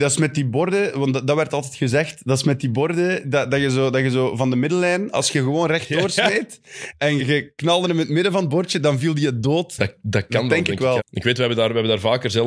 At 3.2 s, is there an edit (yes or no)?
no